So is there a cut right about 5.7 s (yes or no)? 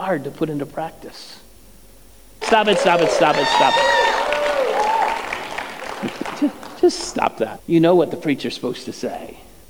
no